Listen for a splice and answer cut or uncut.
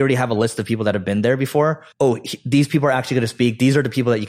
cut